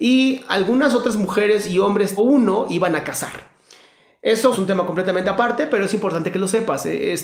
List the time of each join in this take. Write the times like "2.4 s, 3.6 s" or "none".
2.2 s, 4.5 s